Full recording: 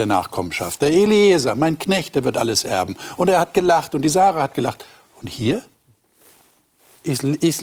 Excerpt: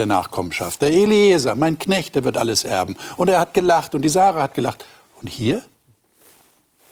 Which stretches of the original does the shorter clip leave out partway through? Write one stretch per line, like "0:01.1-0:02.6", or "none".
none